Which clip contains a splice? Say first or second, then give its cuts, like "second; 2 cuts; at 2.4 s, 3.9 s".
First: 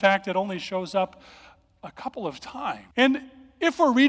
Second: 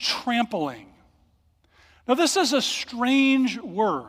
first; 1 cut; at 2.9 s